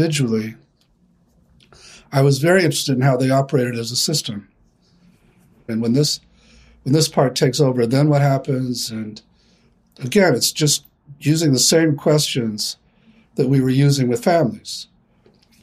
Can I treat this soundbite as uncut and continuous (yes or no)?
no